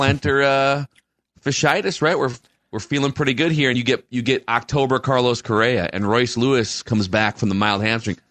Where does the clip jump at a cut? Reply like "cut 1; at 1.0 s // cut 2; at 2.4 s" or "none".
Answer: none